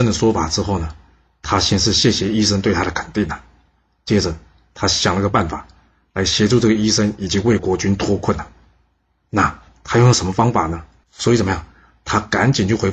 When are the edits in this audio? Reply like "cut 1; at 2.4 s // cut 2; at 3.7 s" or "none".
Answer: cut 1; at 7.6 s // cut 2; at 11.0 s